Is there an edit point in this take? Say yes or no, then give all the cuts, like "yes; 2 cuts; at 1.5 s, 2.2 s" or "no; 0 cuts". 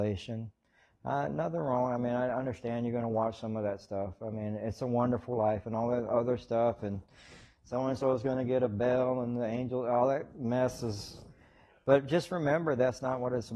no; 0 cuts